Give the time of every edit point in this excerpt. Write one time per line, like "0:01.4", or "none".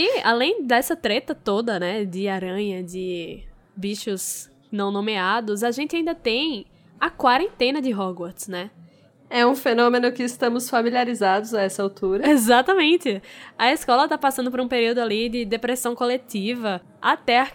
none